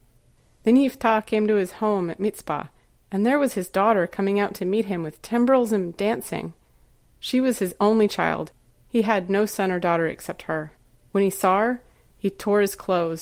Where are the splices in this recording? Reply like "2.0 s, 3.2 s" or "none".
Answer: none

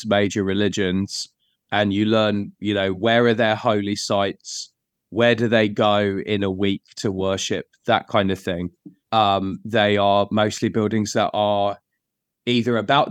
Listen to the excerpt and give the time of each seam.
9.1 s

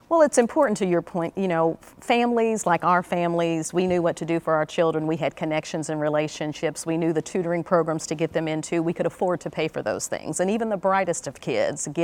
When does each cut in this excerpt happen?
none

